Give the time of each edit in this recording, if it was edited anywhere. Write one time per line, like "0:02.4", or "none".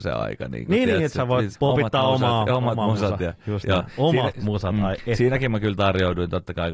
0:01.5